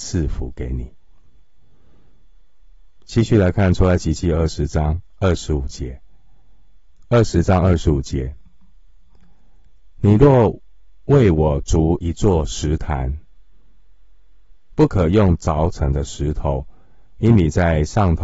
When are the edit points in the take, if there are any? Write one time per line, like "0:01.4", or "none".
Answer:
none